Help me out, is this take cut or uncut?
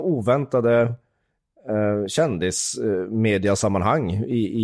uncut